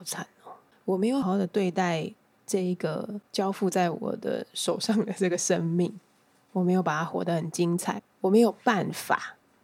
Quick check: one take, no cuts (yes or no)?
no